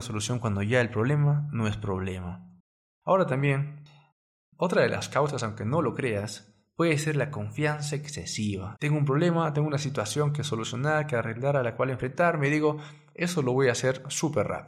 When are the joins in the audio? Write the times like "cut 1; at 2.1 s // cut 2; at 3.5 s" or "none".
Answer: cut 1; at 8.7 s